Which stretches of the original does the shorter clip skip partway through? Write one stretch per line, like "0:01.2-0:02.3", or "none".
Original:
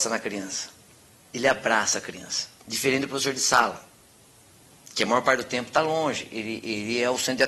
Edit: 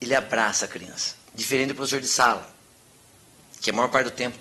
none